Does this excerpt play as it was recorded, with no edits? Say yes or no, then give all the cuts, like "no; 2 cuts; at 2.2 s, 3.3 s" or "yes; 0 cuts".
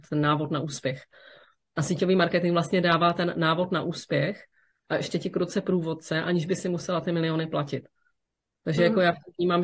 yes; 0 cuts